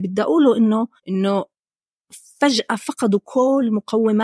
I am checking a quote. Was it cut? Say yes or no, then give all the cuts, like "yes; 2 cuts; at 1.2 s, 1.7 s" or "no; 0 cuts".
yes; 1 cut; at 1.0 s